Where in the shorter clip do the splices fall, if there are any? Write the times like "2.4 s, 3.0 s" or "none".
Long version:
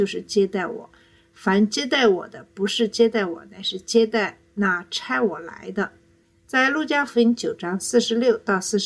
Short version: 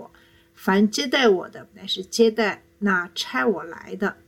1.7 s